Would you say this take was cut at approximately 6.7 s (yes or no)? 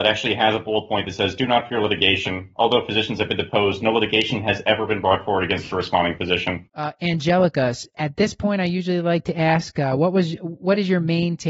yes